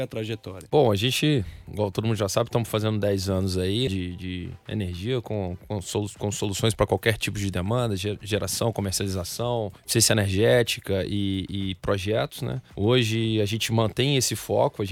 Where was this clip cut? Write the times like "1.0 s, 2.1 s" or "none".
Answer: 3.9 s